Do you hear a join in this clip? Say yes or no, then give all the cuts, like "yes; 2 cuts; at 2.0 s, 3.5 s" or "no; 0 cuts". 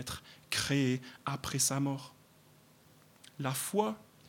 no; 0 cuts